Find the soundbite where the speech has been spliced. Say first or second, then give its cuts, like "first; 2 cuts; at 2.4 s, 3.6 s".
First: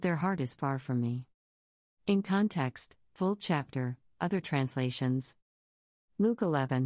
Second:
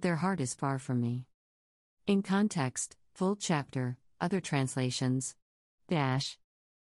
second; 1 cut; at 5.8 s